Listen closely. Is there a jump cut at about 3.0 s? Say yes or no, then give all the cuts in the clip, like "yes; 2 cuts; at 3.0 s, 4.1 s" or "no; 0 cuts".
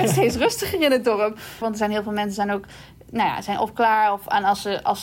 no; 1 cut; at 1.6 s